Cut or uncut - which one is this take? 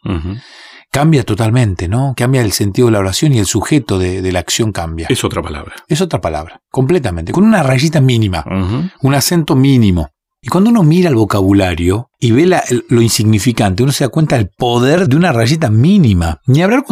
uncut